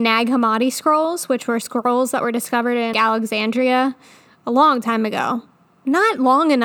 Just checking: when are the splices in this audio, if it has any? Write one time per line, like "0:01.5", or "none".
0:02.9